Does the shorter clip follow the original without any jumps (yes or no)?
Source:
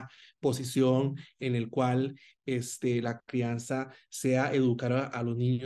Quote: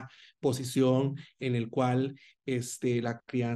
yes